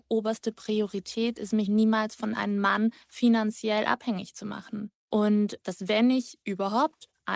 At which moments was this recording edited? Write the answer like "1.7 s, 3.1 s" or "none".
none